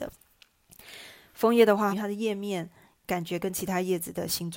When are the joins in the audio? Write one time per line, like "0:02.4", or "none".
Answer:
0:01.9